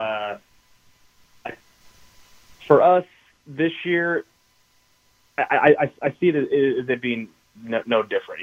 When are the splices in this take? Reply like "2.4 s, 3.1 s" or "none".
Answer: 1.8 s